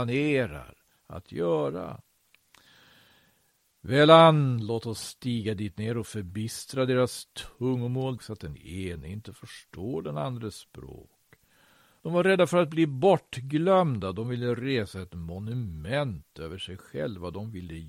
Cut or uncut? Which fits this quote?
cut